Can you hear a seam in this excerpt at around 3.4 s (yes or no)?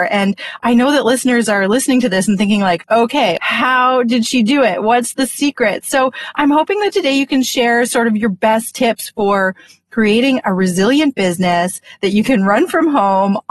yes